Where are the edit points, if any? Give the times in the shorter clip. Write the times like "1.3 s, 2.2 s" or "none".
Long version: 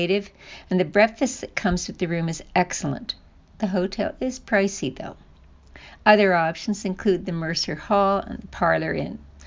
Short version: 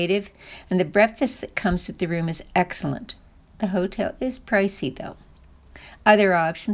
none